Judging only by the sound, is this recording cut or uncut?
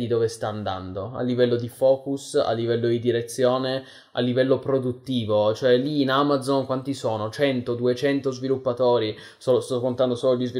uncut